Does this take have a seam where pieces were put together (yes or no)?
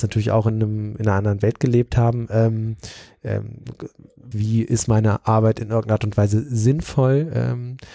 yes